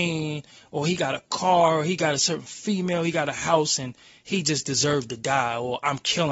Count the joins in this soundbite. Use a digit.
0